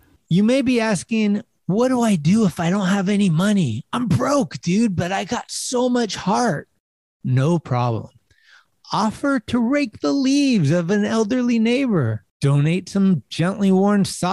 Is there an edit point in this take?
no; 0 cuts

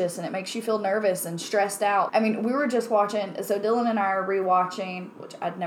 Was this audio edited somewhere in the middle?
yes; 1 cut; at 2.1 s

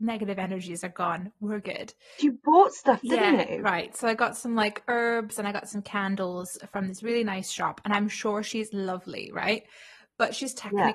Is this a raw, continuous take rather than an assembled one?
no; 1 cut; at 2.2 s

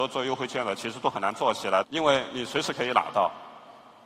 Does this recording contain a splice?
yes; 1 cut; at 1.8 s

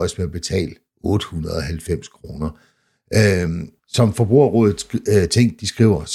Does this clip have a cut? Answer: yes; 1 cut; at 3.8 s

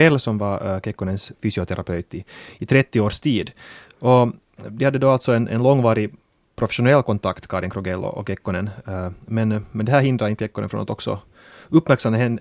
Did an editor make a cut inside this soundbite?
no; 0 cuts

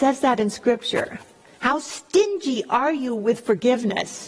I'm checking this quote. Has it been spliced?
no; 0 cuts

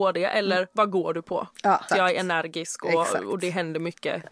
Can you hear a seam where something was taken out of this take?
yes; 1 cut; at 1.9 s

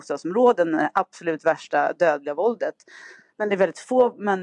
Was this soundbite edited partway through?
no; 0 cuts

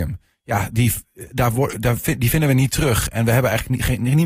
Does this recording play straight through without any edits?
yes; 0 cuts

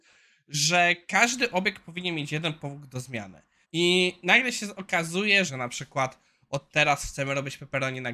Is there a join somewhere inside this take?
yes; 2 cuts; at 3.6 s, 5.5 s

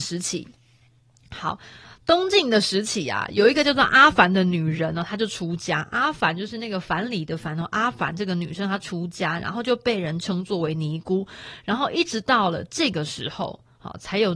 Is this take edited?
no; 0 cuts

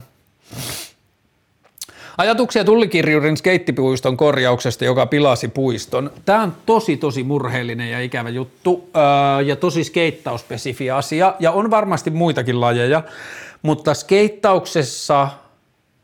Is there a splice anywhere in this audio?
no; 0 cuts

